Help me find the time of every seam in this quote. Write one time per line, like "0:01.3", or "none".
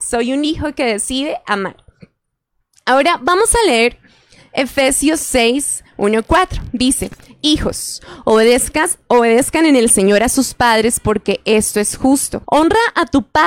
0:12.4

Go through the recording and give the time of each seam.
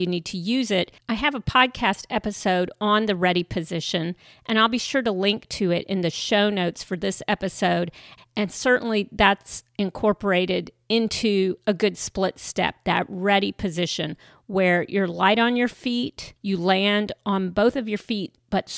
0:01.0
0:08.2
0:16.4

